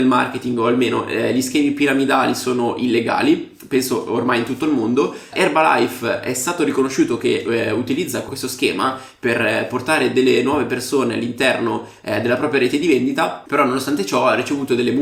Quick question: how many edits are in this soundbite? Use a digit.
0